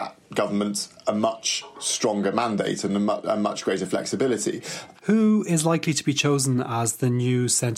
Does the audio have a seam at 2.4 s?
no; 1 cut; at 5.0 s

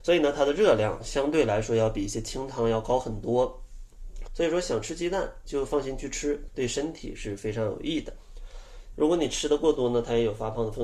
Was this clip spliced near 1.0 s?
no; 3 cuts; at 4.3 s, 6.5 s, 8.9 s

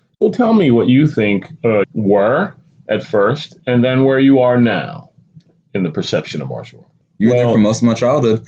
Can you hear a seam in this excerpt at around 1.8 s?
yes; 2 cuts; at 1.8 s, 7.0 s

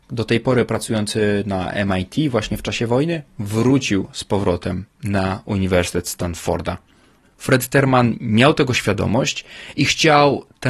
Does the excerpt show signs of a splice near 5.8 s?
no; 1 cut; at 7.2 s

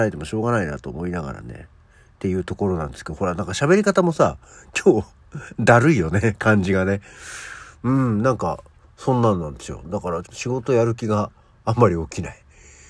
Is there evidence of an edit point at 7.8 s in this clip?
no; 1 cut; at 10.2 s

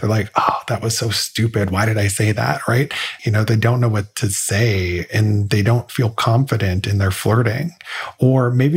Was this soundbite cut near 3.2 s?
yes; 1 cut; at 3.2 s

